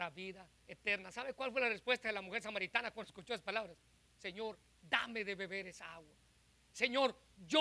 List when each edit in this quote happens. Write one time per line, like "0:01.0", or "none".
none